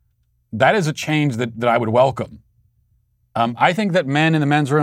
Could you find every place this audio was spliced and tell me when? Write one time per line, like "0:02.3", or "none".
none